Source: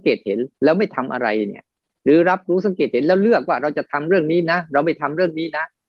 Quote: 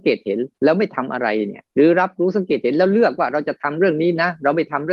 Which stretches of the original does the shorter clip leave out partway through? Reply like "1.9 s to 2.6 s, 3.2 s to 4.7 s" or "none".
1.7 s to 2.0 s